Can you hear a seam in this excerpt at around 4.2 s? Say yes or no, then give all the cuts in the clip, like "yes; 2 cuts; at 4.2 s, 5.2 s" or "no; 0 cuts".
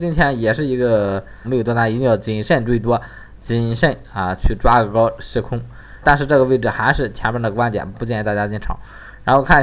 no; 3 cuts; at 1.4 s, 6.0 s, 7.9 s